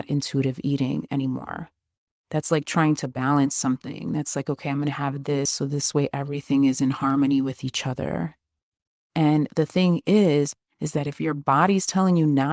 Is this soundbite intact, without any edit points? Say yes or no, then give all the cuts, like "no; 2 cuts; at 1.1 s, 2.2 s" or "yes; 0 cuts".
yes; 0 cuts